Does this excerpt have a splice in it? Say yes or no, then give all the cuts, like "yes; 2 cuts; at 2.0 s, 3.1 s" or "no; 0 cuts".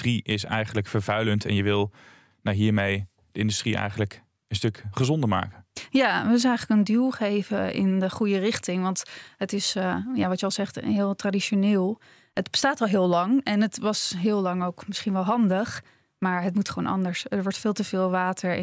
no; 0 cuts